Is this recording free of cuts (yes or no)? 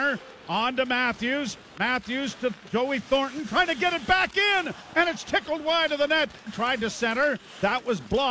no